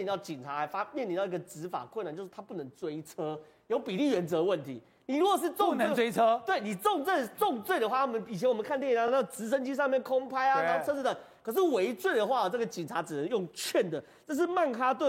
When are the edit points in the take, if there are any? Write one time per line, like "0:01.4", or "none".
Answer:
none